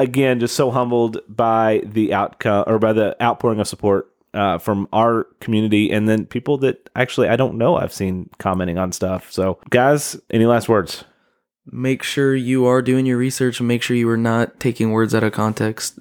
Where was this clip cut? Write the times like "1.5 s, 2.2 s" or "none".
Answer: none